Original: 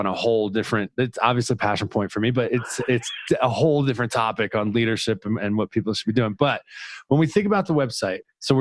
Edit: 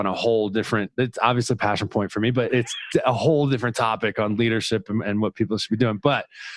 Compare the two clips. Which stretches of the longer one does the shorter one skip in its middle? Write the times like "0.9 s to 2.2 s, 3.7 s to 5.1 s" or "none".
2.5 s to 2.9 s

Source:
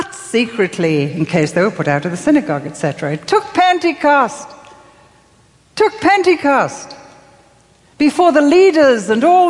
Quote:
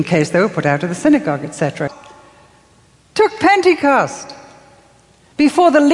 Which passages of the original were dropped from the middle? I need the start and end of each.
3.1 s to 4.5 s

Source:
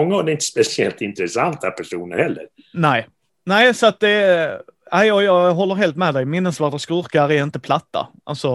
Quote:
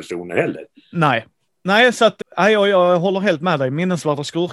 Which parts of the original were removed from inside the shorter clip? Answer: 4.0 s to 4.8 s

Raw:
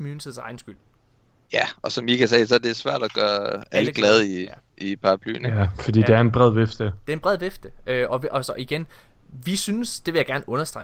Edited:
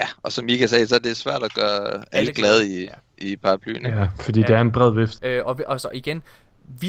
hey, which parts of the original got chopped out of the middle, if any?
6.8 s to 7.8 s

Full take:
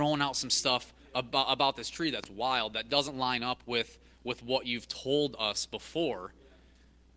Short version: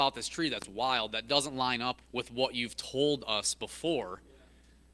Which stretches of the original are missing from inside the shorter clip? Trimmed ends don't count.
3.6 s to 4.1 s

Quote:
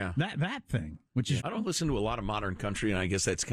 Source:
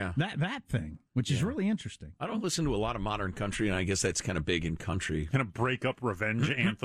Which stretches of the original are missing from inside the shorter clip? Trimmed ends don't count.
1.4 s to 2.2 s

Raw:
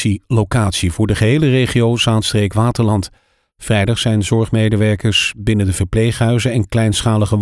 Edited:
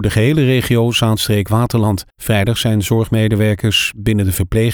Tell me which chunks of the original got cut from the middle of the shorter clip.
3.2 s to 3.5 s

